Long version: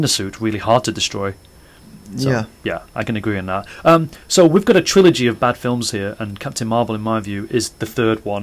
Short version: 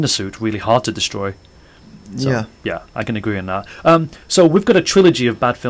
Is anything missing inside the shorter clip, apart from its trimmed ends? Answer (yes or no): no